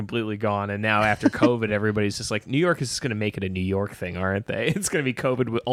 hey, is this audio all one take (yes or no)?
yes